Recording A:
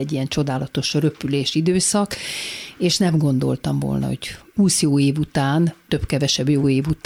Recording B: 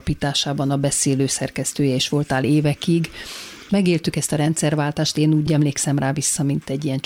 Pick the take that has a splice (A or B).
B